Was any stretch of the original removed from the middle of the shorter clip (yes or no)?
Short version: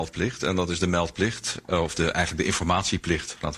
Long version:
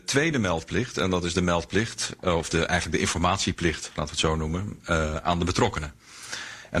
no